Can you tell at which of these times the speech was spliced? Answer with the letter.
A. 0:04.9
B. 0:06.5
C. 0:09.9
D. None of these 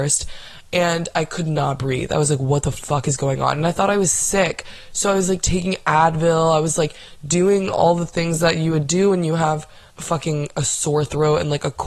C